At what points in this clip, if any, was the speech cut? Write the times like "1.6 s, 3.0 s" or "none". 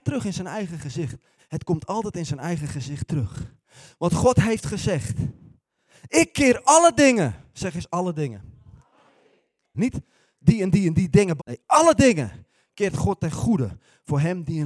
1.4 s, 9.7 s, 11.4 s